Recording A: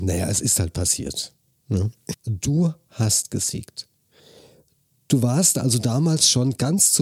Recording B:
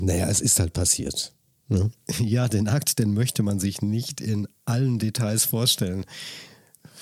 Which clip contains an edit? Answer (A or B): A